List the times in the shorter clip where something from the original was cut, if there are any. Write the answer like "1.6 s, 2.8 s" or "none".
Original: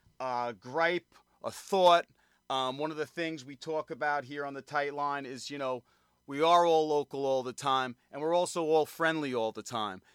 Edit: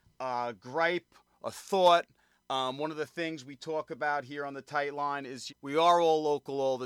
5.5 s